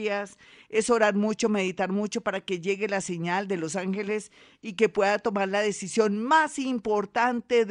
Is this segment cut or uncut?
uncut